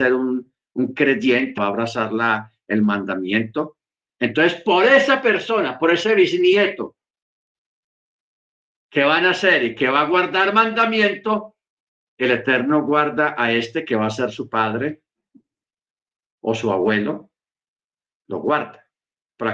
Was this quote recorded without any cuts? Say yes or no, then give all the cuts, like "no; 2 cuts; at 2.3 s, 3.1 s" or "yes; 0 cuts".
no; 1 cut; at 1.6 s